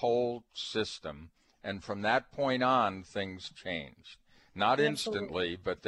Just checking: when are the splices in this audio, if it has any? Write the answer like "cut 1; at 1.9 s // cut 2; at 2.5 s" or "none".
none